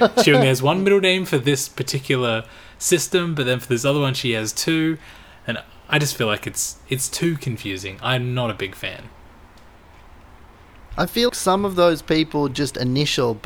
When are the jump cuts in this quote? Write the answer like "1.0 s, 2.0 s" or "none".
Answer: 11.3 s